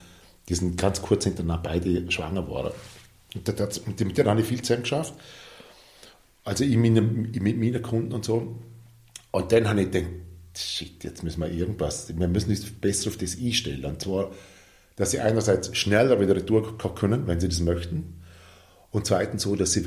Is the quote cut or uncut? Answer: uncut